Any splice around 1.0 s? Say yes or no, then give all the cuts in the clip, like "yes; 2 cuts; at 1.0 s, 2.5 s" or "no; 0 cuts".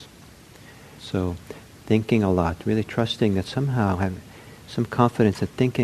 yes; 1 cut; at 1.0 s